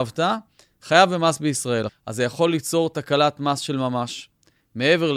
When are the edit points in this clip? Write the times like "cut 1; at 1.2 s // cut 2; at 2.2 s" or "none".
cut 1; at 1.9 s